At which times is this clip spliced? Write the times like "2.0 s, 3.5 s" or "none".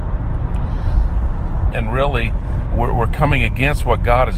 1.7 s